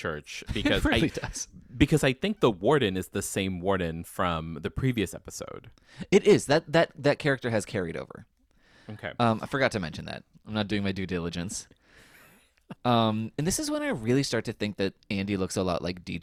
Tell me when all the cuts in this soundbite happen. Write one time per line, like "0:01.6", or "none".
0:10.3
0:12.8